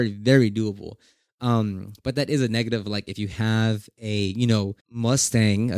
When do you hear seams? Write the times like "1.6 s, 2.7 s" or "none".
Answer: 4.8 s